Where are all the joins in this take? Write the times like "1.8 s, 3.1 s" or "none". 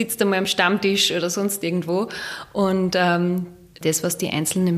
3.8 s